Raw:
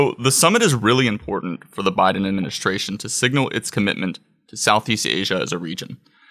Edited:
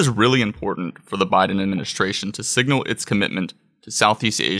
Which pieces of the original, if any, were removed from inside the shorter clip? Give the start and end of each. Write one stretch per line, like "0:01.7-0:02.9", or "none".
none